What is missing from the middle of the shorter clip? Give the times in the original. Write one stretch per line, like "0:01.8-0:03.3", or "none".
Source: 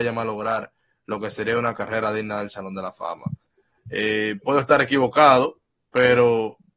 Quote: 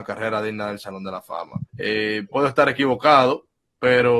0:03.4-0:03.8